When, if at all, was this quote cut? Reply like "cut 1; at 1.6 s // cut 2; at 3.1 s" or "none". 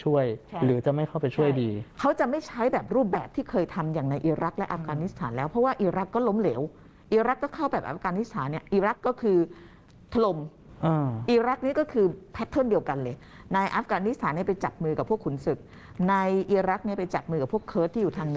cut 1; at 8.9 s